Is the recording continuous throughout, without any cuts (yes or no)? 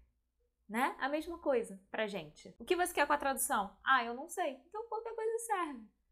yes